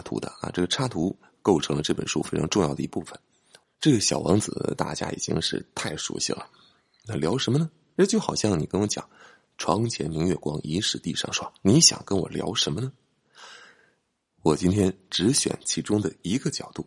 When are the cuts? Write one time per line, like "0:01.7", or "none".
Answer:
0:03.6